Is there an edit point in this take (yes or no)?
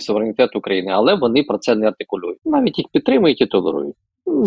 yes